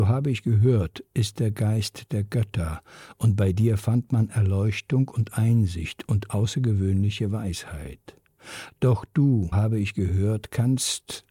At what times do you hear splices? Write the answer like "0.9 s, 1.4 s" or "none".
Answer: 9.5 s